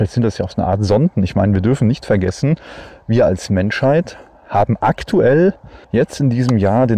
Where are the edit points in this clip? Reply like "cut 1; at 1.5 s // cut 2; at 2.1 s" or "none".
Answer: cut 1; at 5.8 s